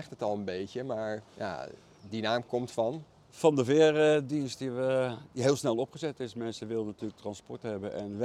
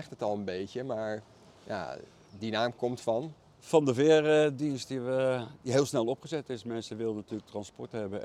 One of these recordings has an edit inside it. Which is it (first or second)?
first